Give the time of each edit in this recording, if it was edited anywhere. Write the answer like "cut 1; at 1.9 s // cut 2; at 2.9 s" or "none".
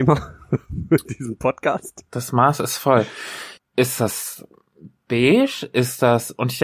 cut 1; at 3.6 s